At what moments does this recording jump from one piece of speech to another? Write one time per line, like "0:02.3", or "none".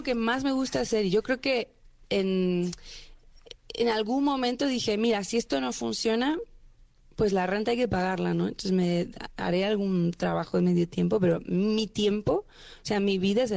0:02.0